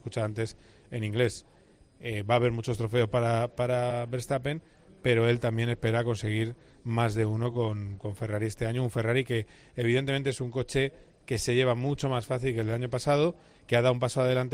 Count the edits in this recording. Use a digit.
0